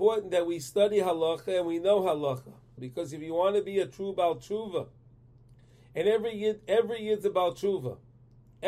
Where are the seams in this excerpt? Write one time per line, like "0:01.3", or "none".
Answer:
0:02.8